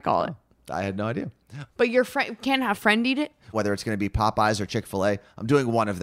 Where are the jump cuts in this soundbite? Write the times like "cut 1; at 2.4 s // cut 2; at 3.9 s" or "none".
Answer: cut 1; at 1.7 s // cut 2; at 3.5 s